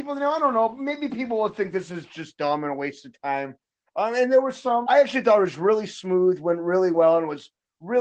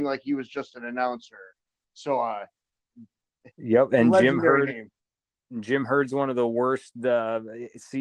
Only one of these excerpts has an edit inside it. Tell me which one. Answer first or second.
first